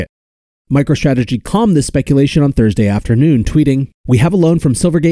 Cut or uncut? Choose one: cut